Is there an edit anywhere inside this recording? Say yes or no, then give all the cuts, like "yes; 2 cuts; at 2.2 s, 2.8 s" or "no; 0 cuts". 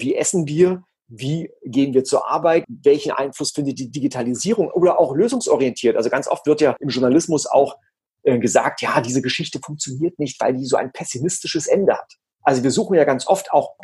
yes; 1 cut; at 2.6 s